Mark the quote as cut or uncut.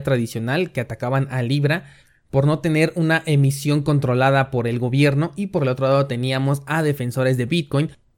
uncut